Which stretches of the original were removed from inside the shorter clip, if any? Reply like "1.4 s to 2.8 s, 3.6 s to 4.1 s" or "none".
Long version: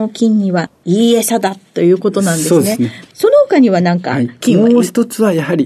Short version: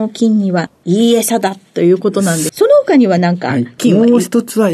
2.5 s to 3.1 s